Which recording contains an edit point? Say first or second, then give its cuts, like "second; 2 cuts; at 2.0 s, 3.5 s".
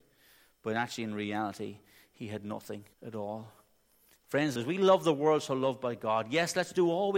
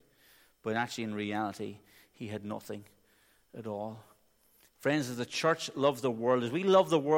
first; 2 cuts; at 2.9 s, 4.6 s